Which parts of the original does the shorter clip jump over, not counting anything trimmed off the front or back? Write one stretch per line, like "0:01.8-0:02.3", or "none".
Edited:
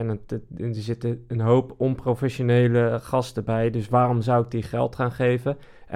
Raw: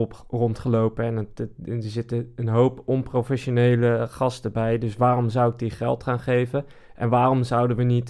none